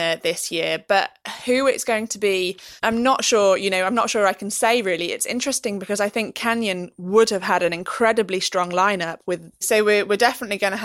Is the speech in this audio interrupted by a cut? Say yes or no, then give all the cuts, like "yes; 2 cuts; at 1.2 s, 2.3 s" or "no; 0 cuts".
yes; 2 cuts; at 2.8 s, 9.6 s